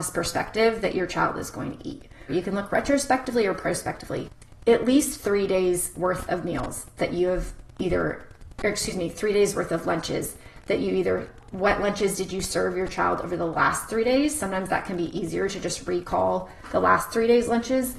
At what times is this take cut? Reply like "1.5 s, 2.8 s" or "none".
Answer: 2.3 s